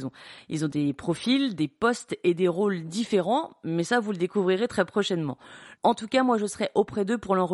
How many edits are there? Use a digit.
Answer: 1